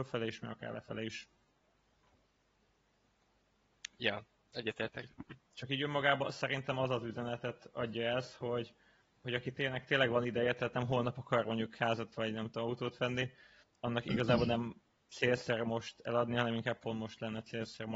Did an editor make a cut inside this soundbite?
no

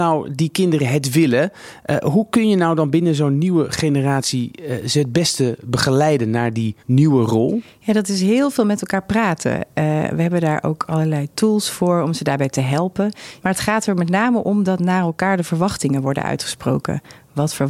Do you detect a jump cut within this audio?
yes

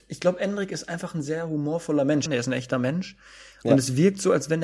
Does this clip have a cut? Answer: yes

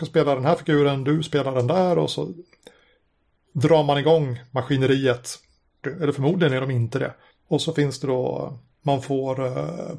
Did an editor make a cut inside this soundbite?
yes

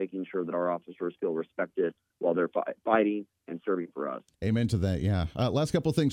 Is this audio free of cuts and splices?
no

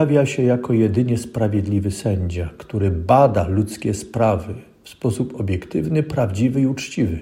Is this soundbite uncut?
yes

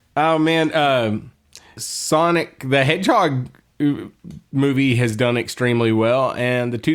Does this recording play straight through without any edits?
no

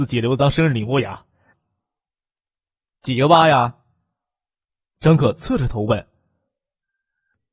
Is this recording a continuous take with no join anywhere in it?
no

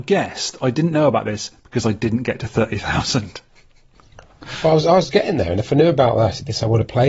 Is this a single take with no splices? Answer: yes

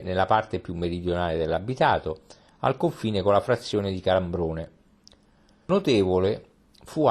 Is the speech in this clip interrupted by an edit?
no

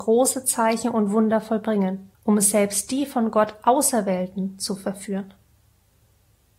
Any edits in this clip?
yes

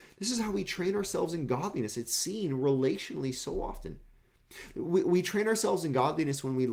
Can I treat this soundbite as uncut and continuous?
yes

